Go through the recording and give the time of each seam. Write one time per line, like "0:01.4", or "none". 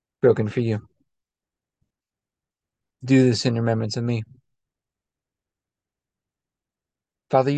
none